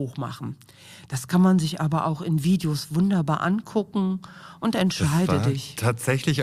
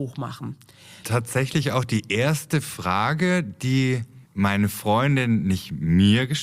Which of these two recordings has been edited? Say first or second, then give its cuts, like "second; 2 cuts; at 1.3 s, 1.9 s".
second; 2 cuts; at 1.0 s, 4.2 s